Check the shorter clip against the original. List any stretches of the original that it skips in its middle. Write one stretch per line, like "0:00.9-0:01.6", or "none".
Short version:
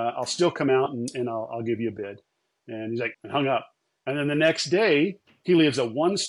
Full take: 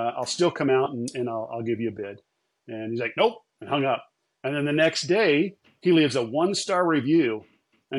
0:03.1-0:03.5